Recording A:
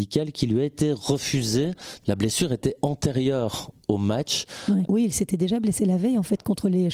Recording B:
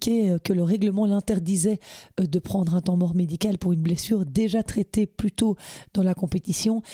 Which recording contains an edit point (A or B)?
A